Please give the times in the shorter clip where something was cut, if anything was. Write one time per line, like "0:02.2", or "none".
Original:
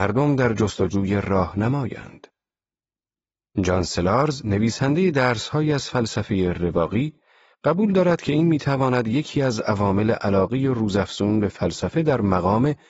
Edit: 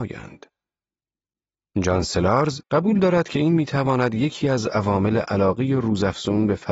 0:02.6